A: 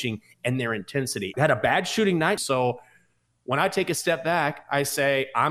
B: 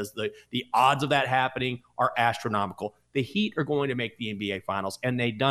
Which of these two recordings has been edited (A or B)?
A